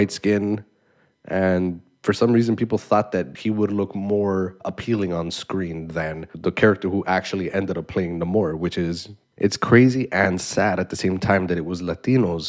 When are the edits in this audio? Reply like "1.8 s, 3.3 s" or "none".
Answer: 3.3 s, 9.3 s